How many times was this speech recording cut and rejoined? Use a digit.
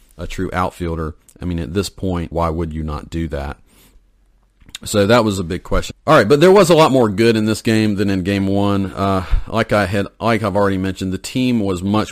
2